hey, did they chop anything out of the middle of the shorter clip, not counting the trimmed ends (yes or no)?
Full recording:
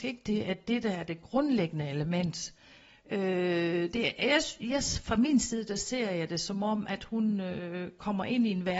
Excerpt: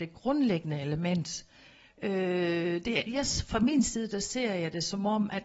yes